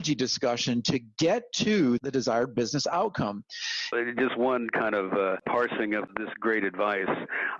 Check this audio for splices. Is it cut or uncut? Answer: cut